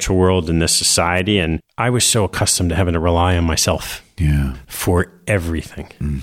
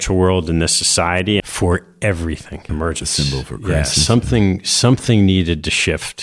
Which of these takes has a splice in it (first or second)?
second